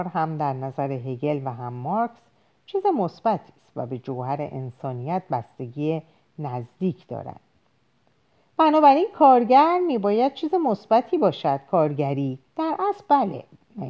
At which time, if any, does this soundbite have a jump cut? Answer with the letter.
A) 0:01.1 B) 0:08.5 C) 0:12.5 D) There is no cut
C